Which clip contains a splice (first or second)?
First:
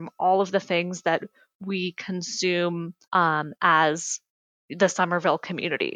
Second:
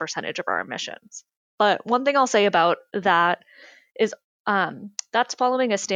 first